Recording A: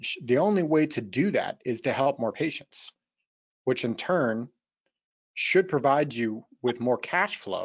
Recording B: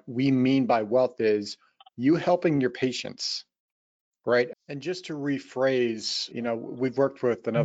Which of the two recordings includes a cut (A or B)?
B